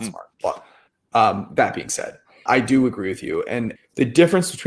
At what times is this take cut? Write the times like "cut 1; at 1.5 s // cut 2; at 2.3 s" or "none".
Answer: cut 1; at 2.5 s // cut 2; at 3.8 s